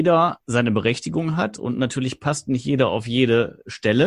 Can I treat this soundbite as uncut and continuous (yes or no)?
yes